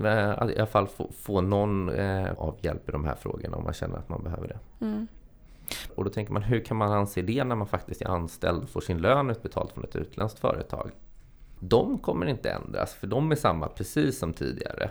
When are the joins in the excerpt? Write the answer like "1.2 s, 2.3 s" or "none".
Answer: 2.4 s, 5.9 s, 11.6 s

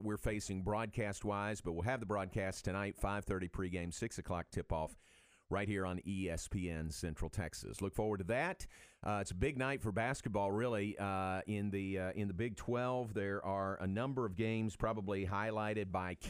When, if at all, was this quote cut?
none

